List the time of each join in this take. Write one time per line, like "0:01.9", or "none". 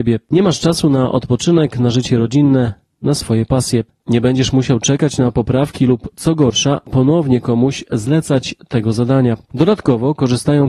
0:04.0